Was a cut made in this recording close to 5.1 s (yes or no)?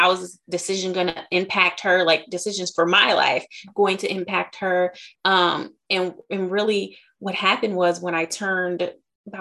yes